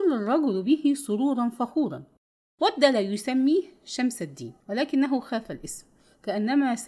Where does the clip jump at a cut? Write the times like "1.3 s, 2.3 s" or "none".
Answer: 4.6 s